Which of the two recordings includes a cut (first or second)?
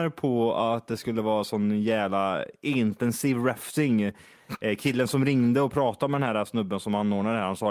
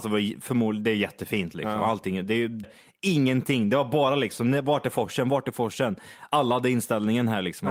second